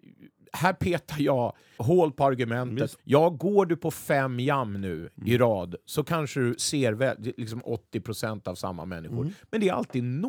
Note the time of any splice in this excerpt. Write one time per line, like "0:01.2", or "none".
0:01.8
0:03.0